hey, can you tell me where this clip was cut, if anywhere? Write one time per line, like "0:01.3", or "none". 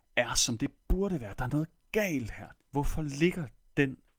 0:02.5